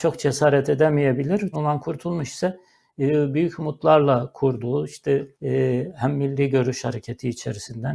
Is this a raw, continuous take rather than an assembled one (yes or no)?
no